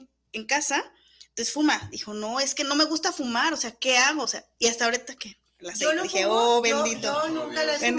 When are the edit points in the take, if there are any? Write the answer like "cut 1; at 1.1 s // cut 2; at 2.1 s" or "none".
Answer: none